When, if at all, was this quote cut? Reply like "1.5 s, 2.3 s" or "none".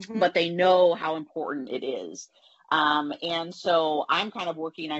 none